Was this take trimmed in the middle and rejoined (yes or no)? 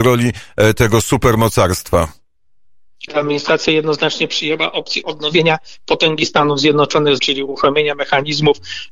yes